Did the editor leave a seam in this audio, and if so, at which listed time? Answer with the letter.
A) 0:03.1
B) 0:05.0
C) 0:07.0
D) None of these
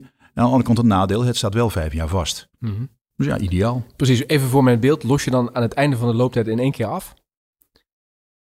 A